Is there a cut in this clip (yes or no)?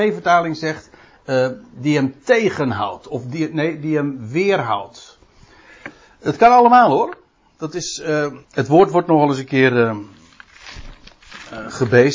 yes